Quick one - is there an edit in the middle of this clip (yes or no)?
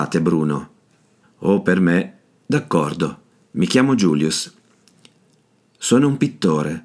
yes